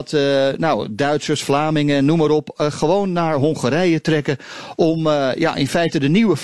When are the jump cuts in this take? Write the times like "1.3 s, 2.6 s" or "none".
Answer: none